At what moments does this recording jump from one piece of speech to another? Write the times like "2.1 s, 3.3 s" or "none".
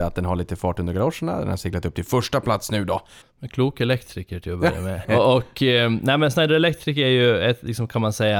3.2 s, 5.0 s